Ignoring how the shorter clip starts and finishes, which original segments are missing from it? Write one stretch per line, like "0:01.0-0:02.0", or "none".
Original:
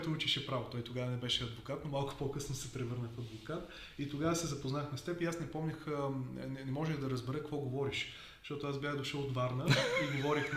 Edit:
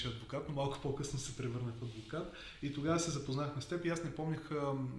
none